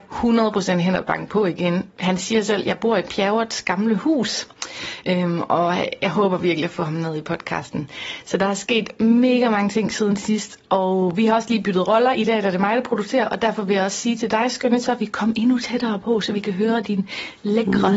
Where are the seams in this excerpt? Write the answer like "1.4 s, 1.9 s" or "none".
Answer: none